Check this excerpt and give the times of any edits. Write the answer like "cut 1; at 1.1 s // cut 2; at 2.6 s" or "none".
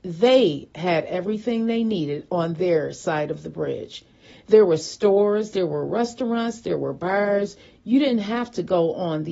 none